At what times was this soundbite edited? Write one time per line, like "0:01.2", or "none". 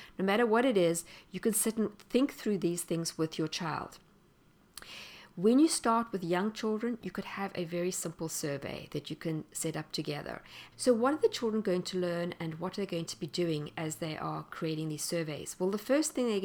0:10.7